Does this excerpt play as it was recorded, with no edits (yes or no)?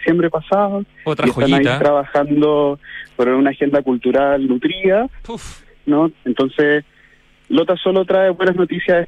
no